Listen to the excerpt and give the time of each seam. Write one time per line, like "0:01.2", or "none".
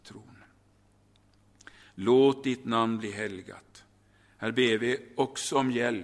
none